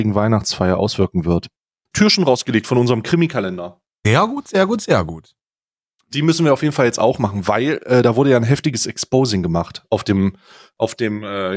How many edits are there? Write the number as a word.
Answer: one